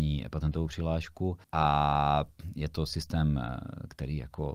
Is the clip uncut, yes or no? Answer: no